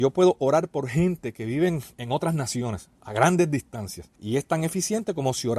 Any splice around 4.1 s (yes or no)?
yes